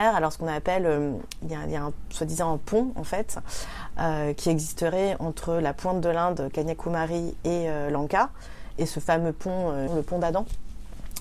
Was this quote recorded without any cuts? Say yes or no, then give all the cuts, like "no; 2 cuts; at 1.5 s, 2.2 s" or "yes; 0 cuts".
no; 1 cut; at 9.9 s